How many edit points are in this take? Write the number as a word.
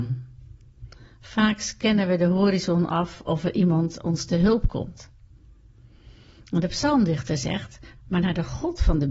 one